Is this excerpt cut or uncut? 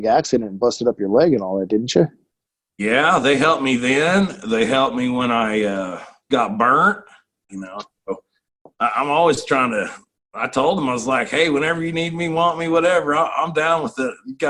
cut